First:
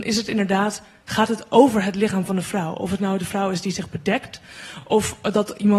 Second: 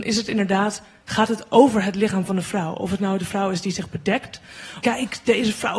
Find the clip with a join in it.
second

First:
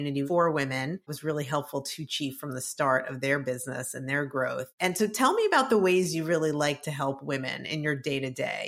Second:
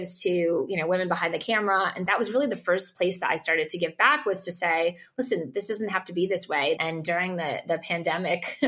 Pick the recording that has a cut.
second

